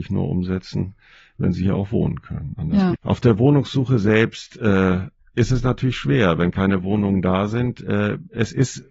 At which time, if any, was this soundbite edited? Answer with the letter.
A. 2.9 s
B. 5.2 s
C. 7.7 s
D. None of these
A